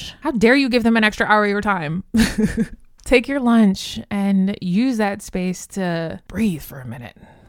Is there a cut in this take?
no; 0 cuts

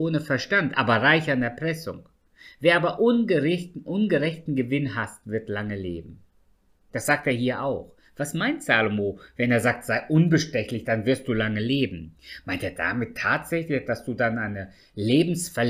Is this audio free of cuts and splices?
yes; 0 cuts

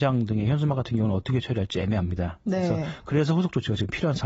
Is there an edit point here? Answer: no; 0 cuts

